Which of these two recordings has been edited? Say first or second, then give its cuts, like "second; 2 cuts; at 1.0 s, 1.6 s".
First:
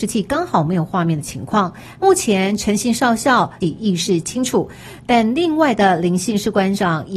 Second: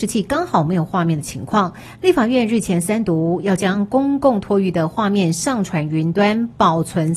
first; 2 cuts; at 1.9 s, 3.6 s